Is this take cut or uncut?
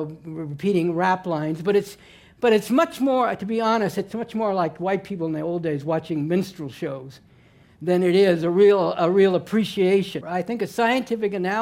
cut